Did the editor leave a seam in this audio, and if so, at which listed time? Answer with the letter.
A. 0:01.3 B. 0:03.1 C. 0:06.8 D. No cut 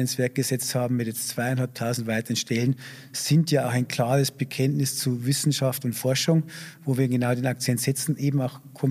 D